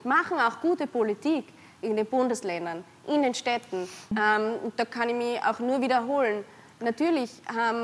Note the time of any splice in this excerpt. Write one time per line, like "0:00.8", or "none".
0:04.1